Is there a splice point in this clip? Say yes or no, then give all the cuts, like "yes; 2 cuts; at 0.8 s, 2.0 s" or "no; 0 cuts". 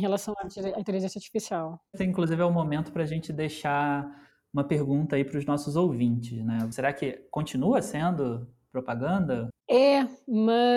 yes; 3 cuts; at 2.0 s, 6.7 s, 9.5 s